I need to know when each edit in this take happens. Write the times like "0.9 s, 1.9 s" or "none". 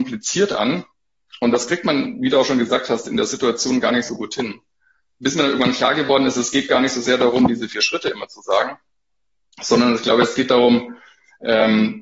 none